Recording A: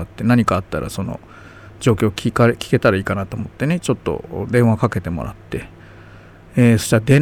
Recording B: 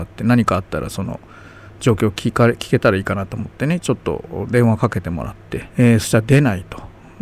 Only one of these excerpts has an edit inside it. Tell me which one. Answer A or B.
B